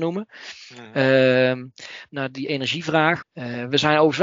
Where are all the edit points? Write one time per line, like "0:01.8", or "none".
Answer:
0:02.1
0:03.2

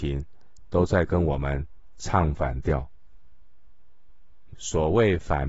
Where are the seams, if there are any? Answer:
0:04.5

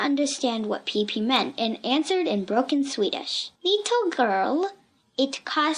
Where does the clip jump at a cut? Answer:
0:03.6

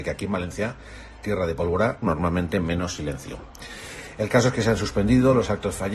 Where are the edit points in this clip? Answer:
0:02.0

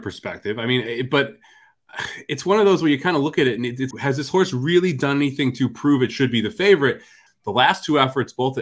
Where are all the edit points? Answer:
0:03.9
0:07.3

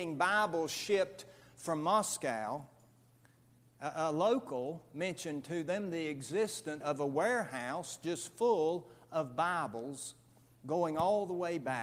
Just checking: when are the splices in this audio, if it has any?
0:06.8

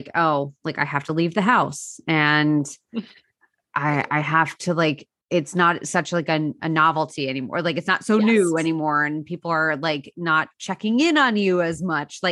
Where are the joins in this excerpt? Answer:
none

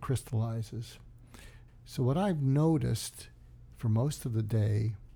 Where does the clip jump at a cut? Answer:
0:01.7

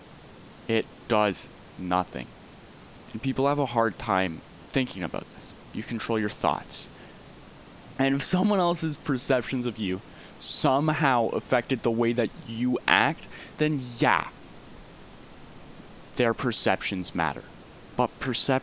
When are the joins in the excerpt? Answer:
0:05.7
0:07.9

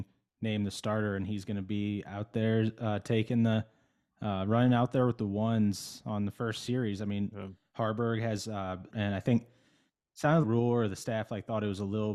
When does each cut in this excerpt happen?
0:08.9
0:10.4

